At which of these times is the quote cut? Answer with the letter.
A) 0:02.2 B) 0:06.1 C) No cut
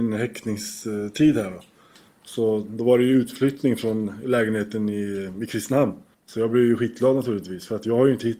B